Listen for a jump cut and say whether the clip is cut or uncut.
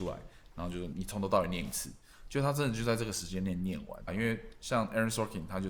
cut